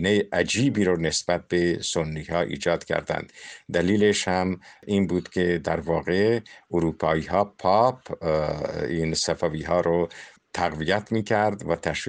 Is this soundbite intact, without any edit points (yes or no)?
yes